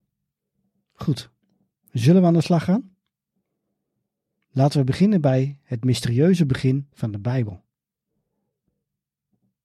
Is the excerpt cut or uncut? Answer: uncut